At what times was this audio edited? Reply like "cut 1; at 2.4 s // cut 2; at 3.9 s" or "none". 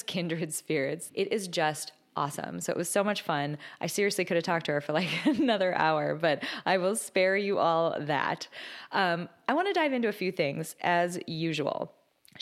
cut 1; at 1.1 s